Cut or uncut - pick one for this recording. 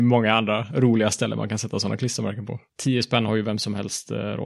cut